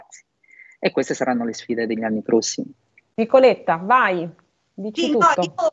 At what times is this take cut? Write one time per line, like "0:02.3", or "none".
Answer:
none

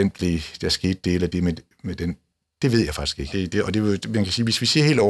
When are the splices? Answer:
0:03.3

